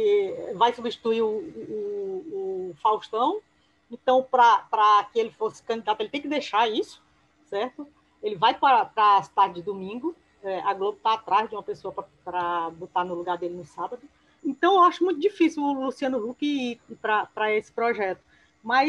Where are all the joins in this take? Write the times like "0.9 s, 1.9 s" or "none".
14.4 s